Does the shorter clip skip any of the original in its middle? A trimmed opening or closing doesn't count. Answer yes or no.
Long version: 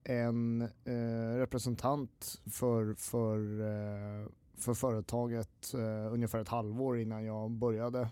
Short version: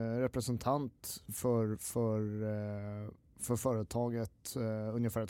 no